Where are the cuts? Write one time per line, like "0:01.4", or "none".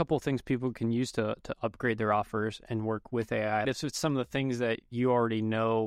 0:03.7